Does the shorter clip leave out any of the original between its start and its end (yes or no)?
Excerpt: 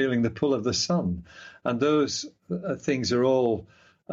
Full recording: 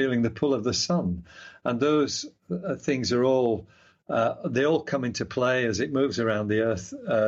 no